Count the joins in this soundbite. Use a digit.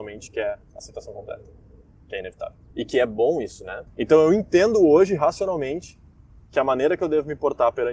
2